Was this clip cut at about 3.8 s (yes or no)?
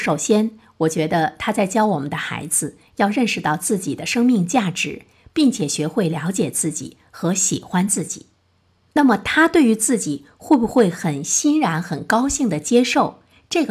no